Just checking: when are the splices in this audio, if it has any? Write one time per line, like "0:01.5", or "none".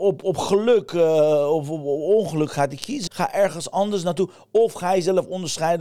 0:03.1